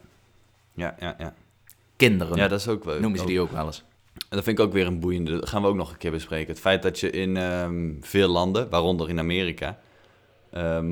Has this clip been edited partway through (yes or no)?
no